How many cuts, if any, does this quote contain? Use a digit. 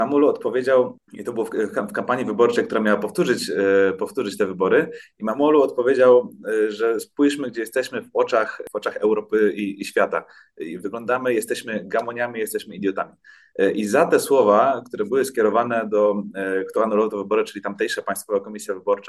0